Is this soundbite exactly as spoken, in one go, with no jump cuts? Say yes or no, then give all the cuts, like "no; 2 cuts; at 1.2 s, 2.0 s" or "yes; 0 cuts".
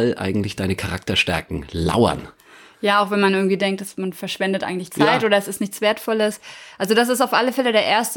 yes; 0 cuts